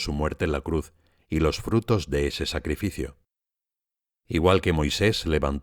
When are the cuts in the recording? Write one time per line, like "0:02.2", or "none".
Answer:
none